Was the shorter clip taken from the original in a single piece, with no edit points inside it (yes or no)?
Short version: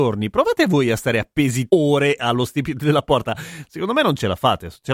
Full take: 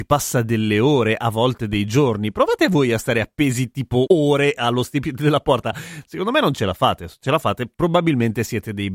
no